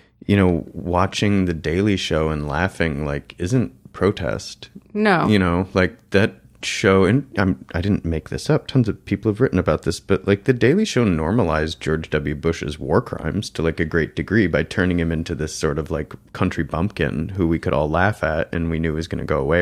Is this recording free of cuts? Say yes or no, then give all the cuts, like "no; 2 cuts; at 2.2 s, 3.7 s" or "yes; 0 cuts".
yes; 0 cuts